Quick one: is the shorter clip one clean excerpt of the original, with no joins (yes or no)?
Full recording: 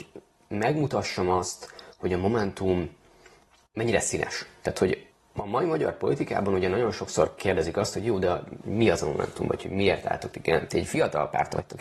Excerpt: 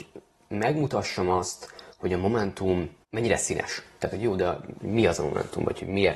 no